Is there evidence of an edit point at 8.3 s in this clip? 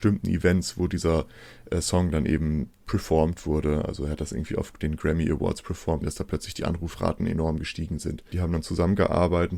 yes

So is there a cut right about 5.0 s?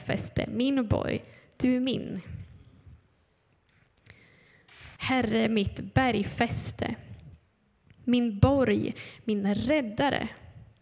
yes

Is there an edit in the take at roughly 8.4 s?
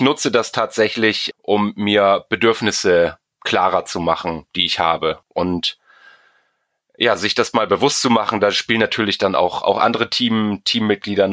no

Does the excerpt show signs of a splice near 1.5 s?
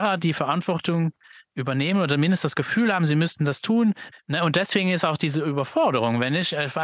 no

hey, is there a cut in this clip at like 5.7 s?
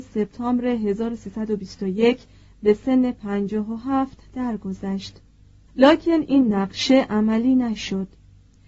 yes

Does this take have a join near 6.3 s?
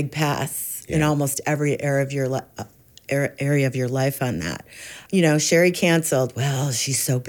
no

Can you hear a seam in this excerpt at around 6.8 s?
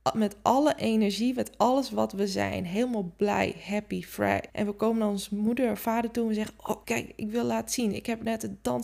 yes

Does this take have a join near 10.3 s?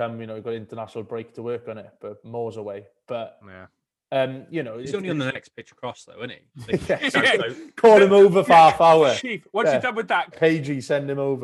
yes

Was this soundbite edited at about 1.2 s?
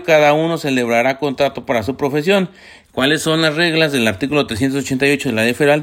no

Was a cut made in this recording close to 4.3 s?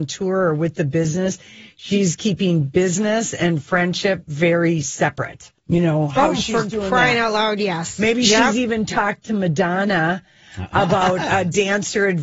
no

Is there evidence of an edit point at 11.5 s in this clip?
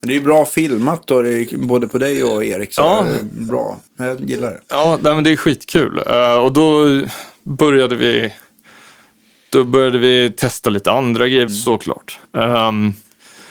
yes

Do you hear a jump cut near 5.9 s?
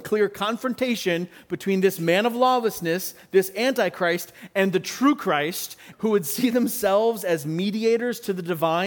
yes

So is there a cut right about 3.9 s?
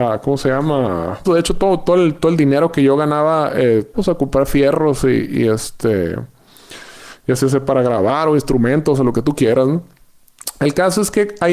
yes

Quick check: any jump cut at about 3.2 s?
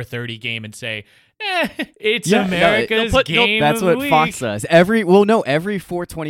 no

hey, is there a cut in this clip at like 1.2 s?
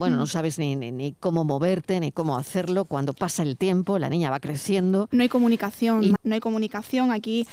no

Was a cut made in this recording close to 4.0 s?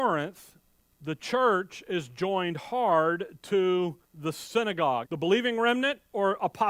yes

